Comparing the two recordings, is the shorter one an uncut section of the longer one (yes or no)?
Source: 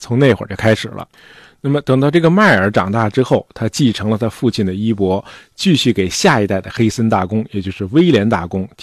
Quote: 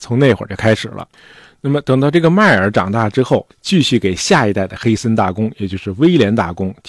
no